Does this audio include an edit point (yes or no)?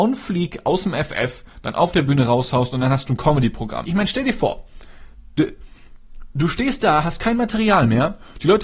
yes